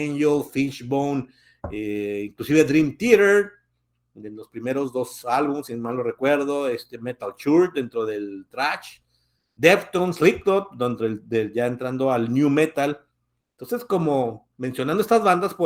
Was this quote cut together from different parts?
no; 0 cuts

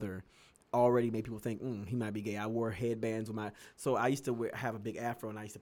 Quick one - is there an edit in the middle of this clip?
no; 0 cuts

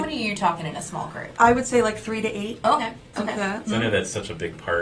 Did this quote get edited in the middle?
yes; 2 cuts; at 1.4 s, 3.7 s

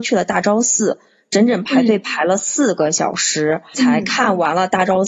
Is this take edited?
no; 0 cuts

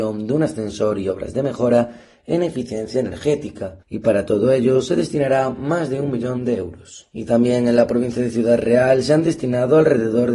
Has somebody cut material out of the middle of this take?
yes; 1 cut; at 3.8 s

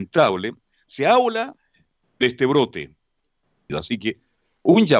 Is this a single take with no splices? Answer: no; 1 cut; at 3.7 s

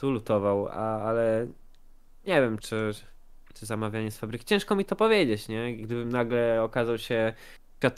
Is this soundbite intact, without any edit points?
yes; 0 cuts

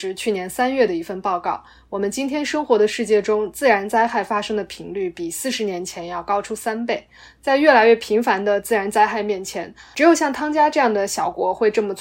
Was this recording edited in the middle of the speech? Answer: no; 0 cuts

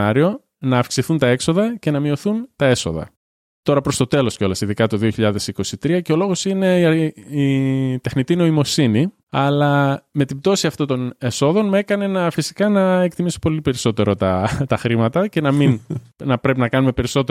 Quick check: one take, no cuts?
no; 1 cut; at 9.2 s

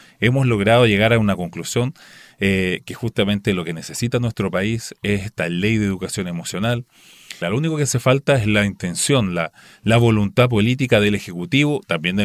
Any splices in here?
yes; 1 cut; at 7.4 s

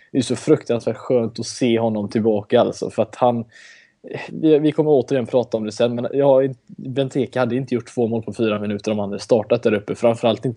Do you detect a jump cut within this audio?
yes; 1 cut; at 4.3 s

